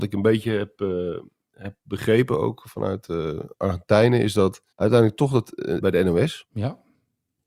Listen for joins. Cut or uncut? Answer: cut